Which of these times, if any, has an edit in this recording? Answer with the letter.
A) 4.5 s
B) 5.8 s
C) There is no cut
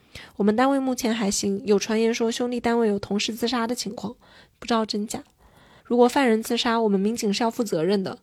B